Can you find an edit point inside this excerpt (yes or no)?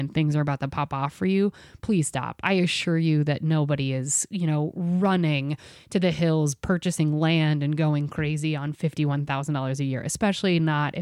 no